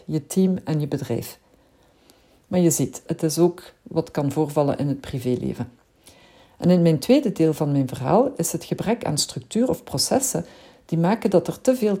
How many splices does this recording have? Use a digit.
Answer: 1